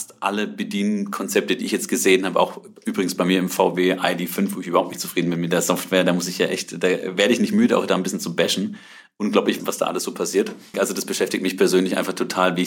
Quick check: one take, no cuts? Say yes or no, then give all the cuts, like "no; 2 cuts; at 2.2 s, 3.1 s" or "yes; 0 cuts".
no; 1 cut; at 10.7 s